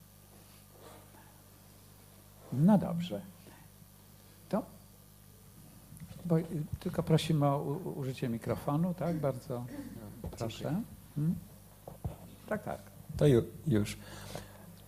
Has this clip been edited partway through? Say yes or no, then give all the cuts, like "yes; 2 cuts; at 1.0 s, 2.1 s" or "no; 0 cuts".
no; 0 cuts